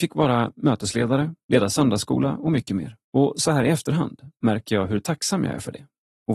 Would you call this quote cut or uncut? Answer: cut